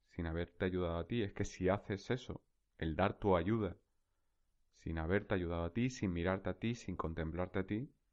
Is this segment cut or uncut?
uncut